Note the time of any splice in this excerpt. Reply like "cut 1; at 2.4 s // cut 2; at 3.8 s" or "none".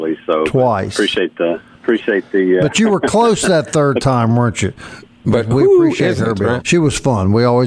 cut 1; at 5.2 s // cut 2; at 6.6 s

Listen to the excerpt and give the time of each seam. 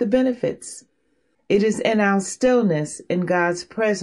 cut 1; at 1.3 s

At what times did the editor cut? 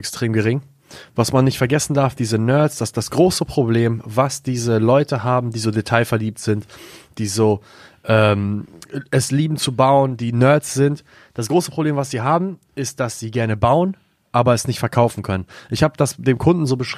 none

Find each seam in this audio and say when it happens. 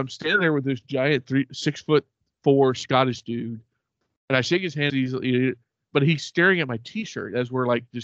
cut 1; at 4.9 s

